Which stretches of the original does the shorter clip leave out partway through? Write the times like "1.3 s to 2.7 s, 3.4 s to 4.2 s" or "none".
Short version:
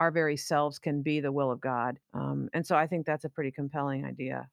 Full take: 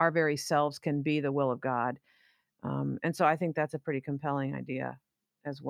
2.0 s to 2.5 s